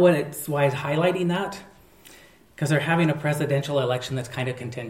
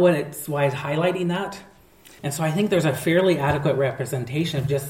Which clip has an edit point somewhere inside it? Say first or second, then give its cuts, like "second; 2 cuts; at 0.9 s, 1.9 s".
second; 1 cut; at 2.2 s